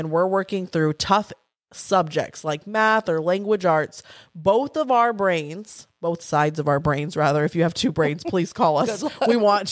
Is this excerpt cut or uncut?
uncut